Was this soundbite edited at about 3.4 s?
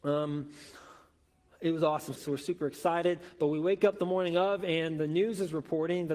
no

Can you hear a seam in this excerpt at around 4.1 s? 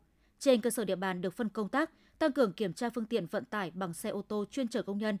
no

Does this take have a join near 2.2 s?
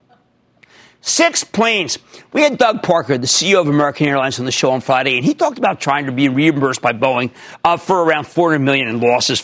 no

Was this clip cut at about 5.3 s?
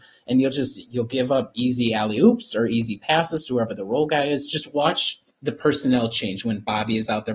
yes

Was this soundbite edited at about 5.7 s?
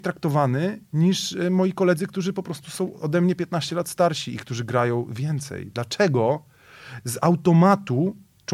no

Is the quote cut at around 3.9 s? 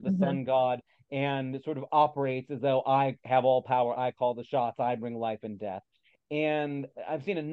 no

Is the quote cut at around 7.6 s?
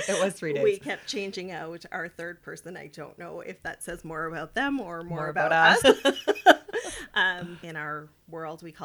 yes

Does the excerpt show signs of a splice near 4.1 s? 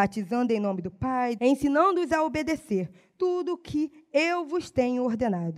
no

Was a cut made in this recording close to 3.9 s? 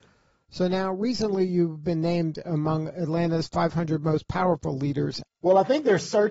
no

